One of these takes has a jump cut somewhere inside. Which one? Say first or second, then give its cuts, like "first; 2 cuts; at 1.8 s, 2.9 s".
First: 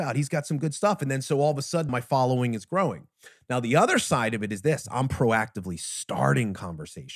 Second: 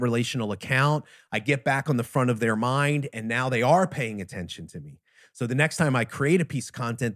first; 1 cut; at 1.9 s